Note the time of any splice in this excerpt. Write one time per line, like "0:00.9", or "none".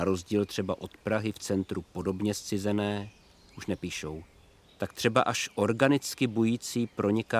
0:04.7